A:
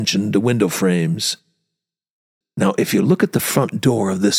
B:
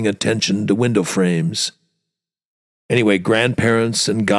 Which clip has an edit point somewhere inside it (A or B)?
A